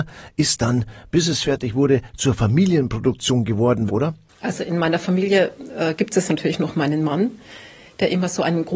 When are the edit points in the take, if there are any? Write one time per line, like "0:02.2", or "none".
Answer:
0:03.9